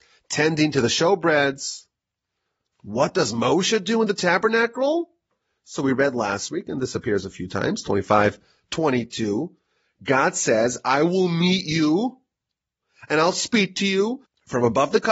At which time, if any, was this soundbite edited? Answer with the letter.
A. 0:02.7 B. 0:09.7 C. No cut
A